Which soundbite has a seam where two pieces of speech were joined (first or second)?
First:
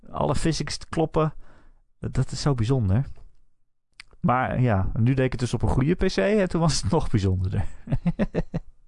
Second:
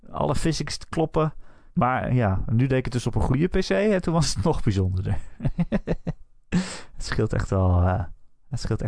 second